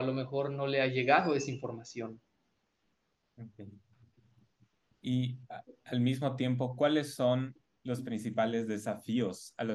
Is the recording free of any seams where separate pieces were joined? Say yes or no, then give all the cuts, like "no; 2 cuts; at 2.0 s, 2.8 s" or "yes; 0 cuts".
yes; 0 cuts